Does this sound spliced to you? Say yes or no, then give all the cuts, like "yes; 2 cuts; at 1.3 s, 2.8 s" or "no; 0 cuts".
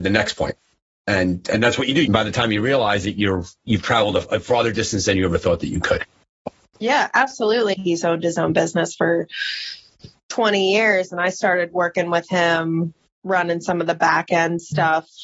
yes; 2 cuts; at 2.0 s, 7.7 s